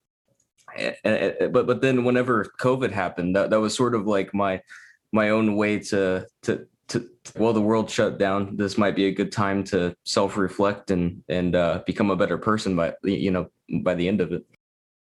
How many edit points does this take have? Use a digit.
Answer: 2